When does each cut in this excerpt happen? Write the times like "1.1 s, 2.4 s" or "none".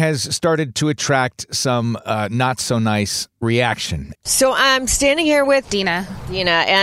4.1 s